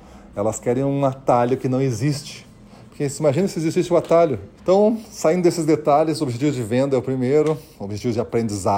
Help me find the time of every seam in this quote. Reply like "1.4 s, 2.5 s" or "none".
4.6 s